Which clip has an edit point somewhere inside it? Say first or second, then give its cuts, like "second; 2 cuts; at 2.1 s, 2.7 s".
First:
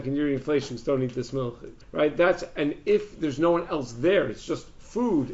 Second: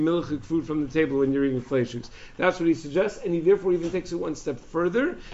first; 1 cut; at 1.8 s